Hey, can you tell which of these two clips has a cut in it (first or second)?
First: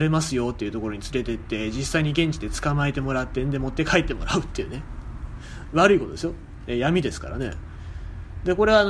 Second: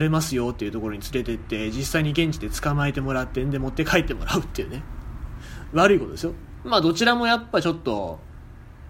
second